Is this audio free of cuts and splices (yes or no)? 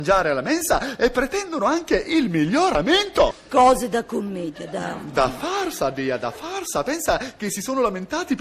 yes